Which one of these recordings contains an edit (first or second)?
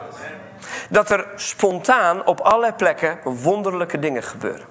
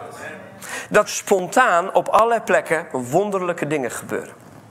second